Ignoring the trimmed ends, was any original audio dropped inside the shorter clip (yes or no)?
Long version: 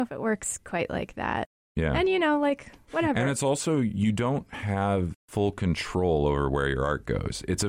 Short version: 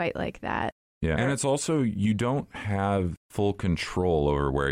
yes